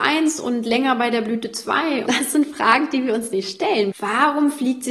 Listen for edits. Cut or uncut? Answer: cut